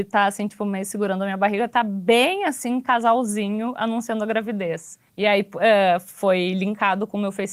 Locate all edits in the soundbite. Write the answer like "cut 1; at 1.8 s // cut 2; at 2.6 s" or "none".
cut 1; at 5.1 s